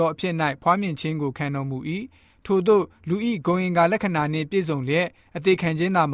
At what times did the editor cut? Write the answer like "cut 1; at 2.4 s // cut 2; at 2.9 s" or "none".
none

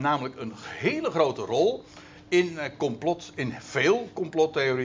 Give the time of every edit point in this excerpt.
none

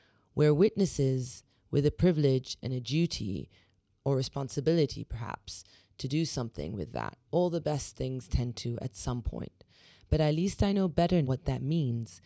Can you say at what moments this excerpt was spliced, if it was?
cut 1; at 7.3 s // cut 2; at 11.2 s

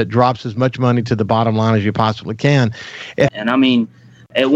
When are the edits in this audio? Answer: cut 1; at 3.3 s

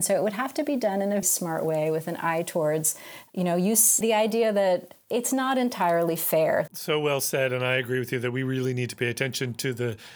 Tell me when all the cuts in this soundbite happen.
cut 1; at 1.2 s // cut 2; at 4.0 s // cut 3; at 6.7 s

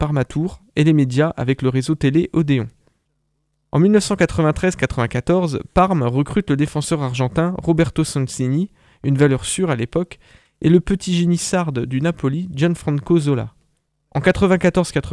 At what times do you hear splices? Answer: cut 1; at 14.0 s

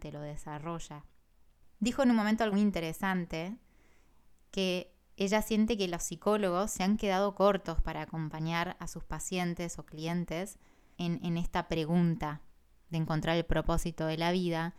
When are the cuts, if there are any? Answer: cut 1; at 2.5 s // cut 2; at 10.9 s

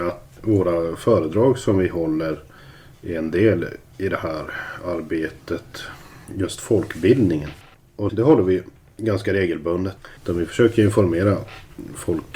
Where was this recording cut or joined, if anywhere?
cut 1; at 8.1 s // cut 2; at 10.2 s

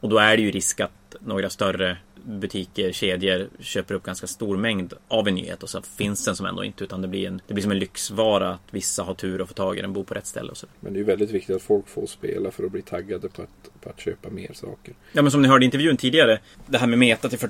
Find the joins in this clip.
none

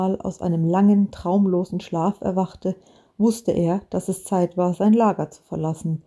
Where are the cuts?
none

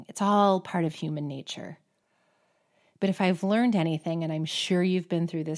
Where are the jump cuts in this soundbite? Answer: none

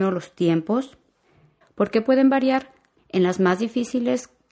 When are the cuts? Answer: cut 1; at 1.6 s // cut 2; at 3.0 s

